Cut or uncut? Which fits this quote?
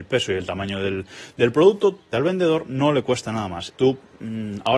cut